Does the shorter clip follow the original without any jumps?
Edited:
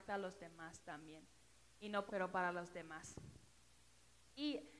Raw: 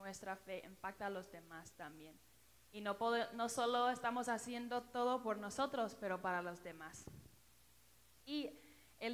no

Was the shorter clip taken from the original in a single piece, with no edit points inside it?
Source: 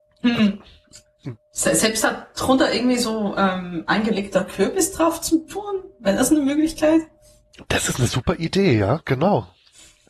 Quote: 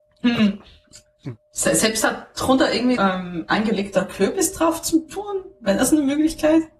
no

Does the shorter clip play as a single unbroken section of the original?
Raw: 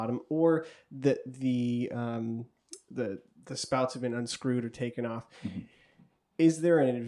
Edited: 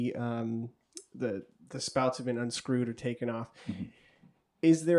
yes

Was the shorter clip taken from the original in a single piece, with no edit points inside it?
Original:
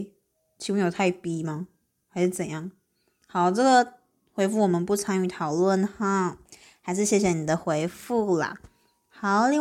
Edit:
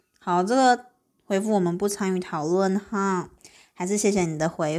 yes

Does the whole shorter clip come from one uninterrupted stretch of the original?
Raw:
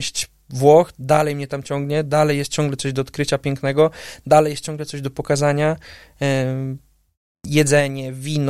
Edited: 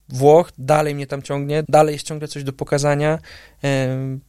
no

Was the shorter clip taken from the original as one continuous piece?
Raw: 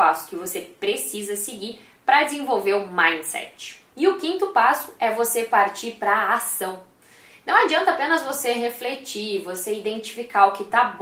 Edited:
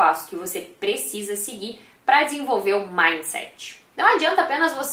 no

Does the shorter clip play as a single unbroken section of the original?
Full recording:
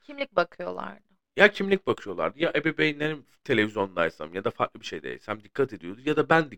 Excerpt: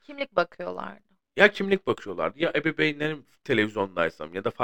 yes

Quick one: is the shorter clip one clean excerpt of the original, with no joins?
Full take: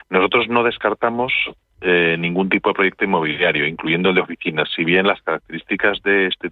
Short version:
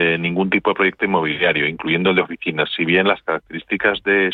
yes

